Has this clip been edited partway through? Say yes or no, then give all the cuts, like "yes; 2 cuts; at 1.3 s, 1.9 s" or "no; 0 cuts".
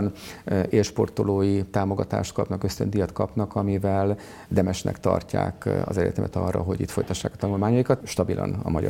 yes; 2 cuts; at 4.5 s, 8.0 s